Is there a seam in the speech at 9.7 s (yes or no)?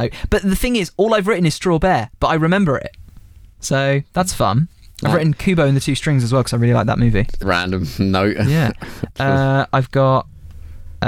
no